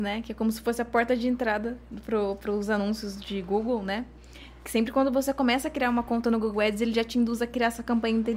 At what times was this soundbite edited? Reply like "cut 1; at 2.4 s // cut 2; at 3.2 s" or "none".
none